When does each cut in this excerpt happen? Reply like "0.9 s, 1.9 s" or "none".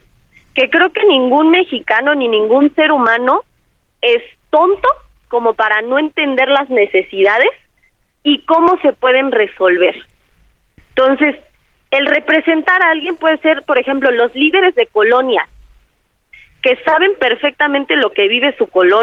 none

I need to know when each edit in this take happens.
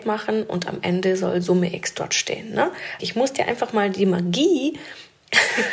3.0 s

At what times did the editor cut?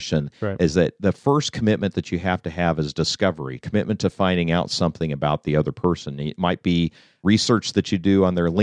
3.6 s

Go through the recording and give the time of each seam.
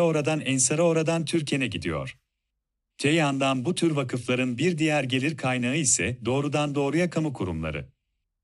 2.9 s

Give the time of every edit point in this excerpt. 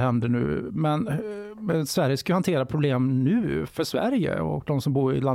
3.7 s

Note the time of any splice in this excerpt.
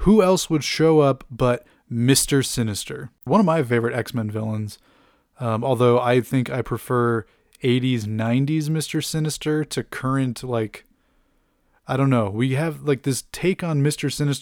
3.3 s

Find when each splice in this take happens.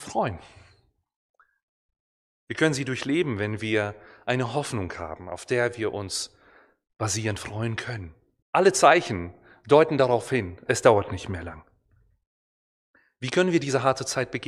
8.4 s, 10.7 s

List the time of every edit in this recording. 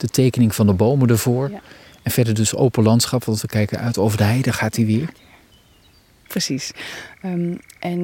6.3 s

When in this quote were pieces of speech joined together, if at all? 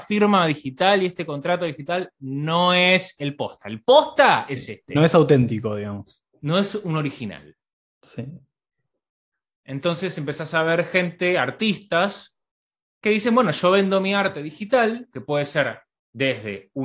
none

